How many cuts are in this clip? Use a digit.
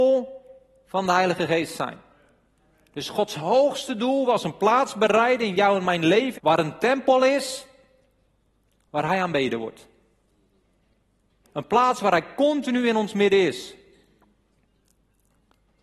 2